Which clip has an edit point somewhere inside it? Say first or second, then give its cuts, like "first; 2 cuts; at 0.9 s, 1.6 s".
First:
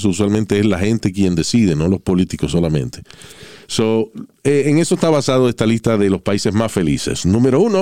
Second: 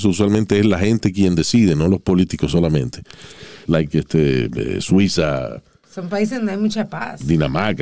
second; 1 cut; at 3.7 s